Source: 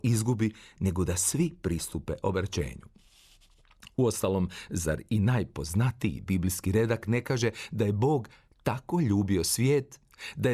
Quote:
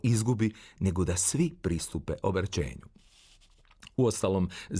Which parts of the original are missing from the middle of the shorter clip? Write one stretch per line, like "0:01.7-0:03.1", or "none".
none